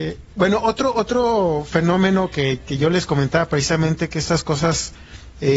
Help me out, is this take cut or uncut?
uncut